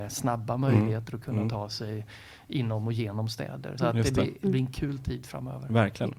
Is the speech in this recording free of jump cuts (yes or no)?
no